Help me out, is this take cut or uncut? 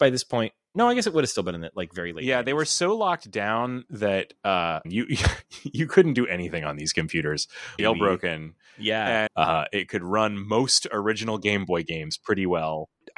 cut